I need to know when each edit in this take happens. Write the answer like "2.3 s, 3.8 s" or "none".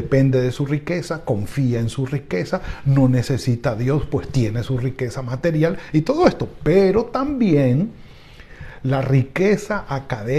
none